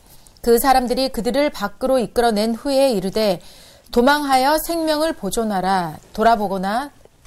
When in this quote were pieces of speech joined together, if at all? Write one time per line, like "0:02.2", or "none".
none

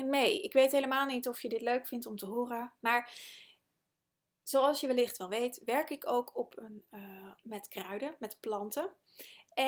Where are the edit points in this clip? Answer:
0:02.8
0:07.4

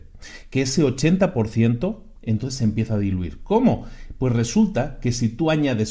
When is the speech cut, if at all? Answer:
none

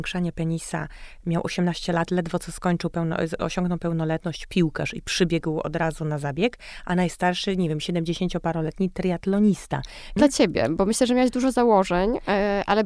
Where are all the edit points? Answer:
0:10.2

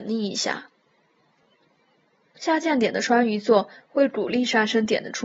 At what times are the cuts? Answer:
none

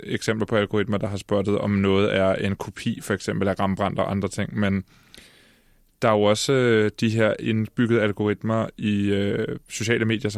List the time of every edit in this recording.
none

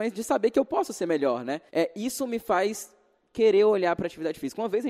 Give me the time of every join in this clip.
0:01.7

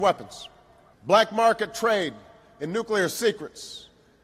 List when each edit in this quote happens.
0:00.9

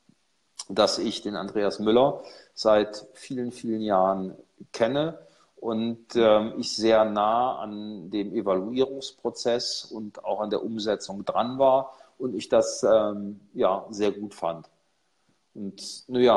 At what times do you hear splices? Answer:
none

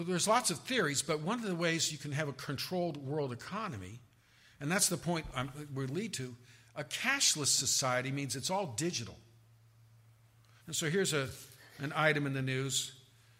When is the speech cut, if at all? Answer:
0:10.6

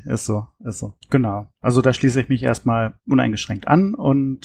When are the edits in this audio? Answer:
0:01.0

